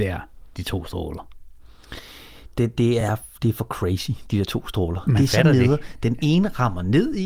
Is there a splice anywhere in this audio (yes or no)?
no